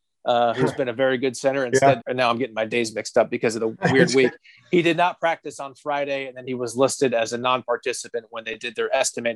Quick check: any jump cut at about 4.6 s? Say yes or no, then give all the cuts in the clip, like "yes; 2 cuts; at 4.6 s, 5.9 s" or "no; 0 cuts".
no; 1 cut; at 2.0 s